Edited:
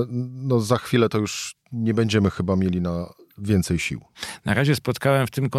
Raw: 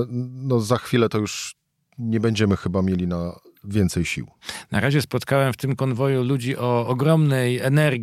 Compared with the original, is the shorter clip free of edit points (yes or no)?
no